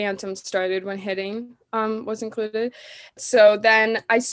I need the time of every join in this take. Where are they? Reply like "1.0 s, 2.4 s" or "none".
3.2 s

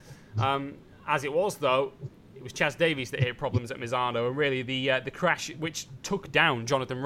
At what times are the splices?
none

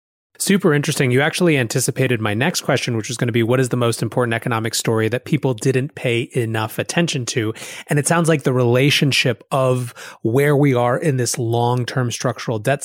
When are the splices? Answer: none

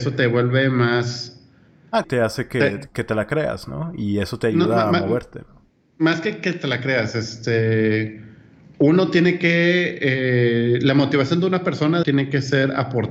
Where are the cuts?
2.0 s, 12.0 s

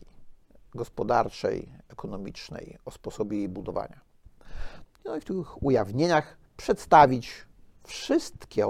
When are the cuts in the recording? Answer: 4.8 s, 6.5 s

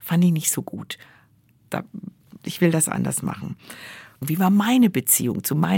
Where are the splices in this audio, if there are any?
2.4 s, 4.2 s

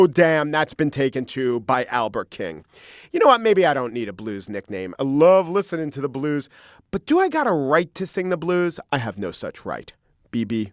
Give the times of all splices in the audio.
5.0 s

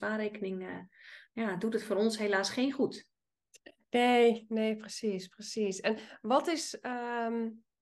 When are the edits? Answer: none

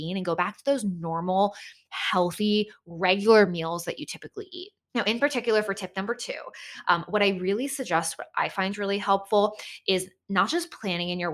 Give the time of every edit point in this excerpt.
none

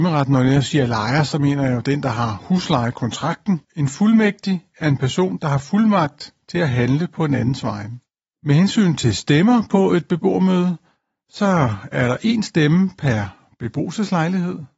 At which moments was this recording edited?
3.6 s

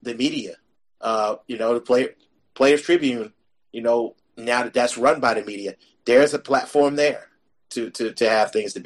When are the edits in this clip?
none

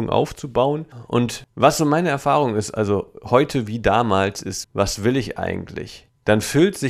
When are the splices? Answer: 4.6 s

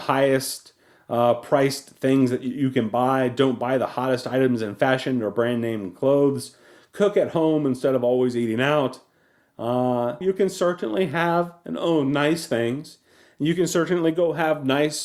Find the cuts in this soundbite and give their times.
10.2 s

